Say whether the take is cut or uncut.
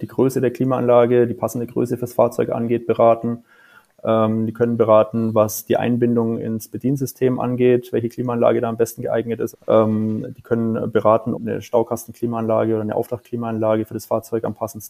cut